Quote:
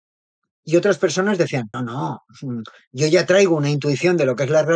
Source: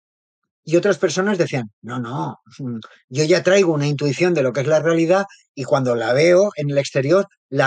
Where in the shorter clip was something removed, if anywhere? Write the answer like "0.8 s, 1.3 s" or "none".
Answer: 1.7 s